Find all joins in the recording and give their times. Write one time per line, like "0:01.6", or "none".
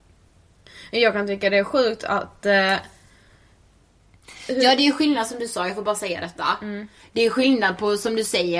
none